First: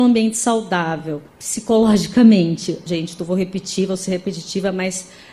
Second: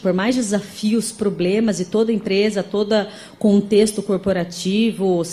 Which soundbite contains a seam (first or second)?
first